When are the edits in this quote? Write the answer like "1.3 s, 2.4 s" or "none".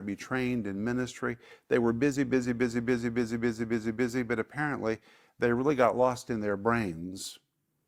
2.4 s